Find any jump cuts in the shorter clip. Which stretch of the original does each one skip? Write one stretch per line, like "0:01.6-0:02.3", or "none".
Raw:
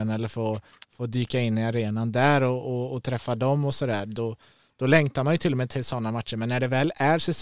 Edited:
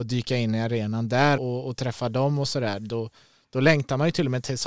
0:02.4-0:02.6